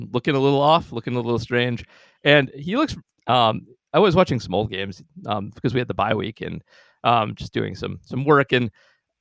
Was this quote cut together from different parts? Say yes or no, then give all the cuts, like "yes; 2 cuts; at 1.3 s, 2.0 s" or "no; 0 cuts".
no; 0 cuts